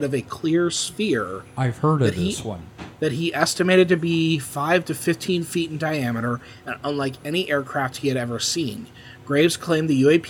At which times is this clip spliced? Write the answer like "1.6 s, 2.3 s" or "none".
3.0 s